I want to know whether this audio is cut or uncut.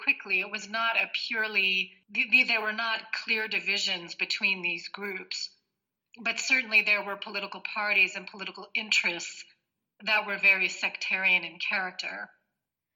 uncut